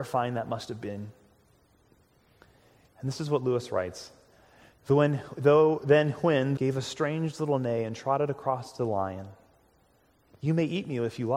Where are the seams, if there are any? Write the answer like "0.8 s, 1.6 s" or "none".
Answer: 6.6 s, 10.3 s